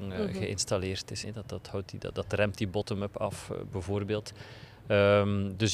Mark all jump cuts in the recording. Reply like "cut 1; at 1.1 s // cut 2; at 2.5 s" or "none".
cut 1; at 1.2 s